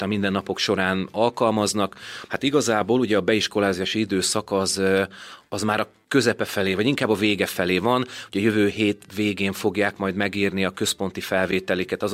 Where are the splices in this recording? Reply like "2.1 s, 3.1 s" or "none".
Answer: 2.3 s

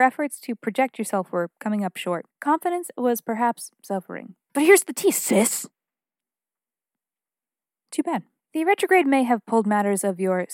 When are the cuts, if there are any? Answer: 4.5 s, 8.4 s

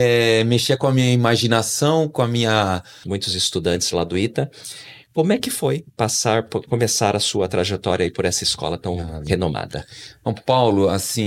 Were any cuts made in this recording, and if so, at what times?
3.0 s

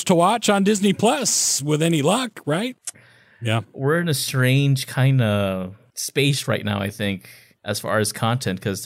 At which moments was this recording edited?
2.9 s

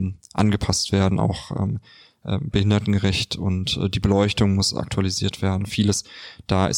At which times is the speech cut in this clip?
none

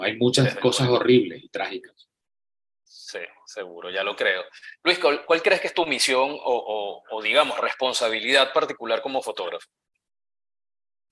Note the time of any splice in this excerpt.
none

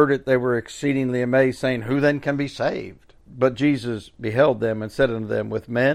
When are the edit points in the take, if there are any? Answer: 3.2 s

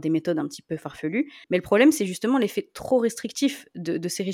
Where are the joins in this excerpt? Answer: 1.4 s

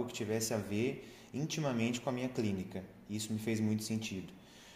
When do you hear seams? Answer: none

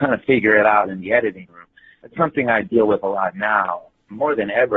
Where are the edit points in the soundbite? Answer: none

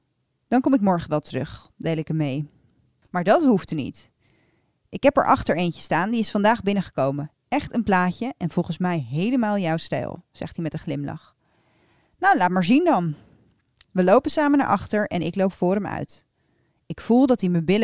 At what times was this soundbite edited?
none

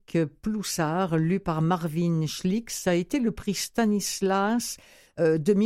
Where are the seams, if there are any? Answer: none

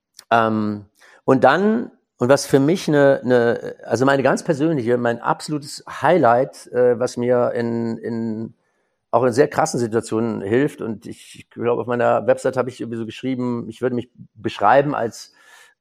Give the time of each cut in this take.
none

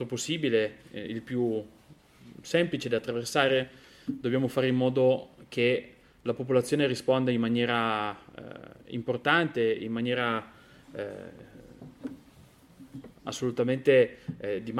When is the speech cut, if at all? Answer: none

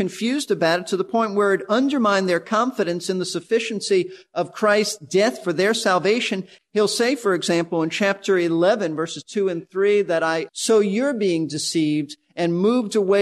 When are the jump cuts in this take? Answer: 6.6 s, 10.5 s

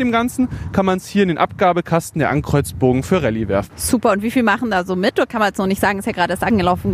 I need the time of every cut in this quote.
none

